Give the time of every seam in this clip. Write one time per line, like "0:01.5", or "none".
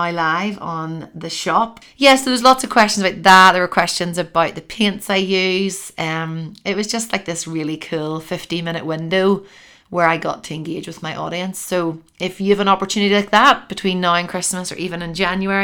0:01.8